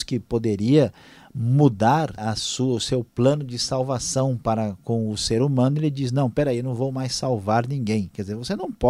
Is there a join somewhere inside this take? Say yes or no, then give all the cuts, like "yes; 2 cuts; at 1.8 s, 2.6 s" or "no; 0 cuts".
yes; 1 cut; at 2.2 s